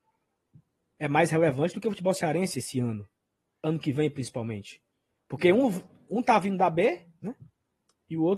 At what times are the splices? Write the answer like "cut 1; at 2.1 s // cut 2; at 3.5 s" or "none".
none